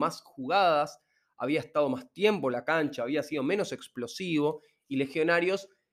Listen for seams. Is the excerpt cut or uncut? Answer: uncut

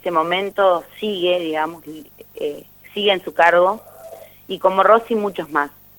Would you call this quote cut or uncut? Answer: uncut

